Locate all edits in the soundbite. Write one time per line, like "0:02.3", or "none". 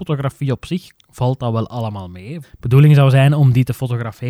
0:00.9
0:02.4